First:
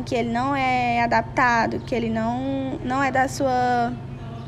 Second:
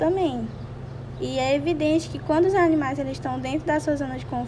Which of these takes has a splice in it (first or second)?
second